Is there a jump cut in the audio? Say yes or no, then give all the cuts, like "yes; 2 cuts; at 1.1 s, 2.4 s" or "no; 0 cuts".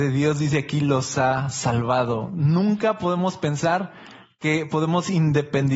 no; 0 cuts